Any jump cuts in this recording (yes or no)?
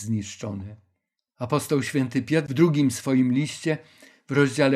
no